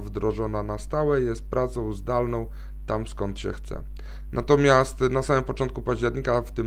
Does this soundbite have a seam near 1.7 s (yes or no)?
no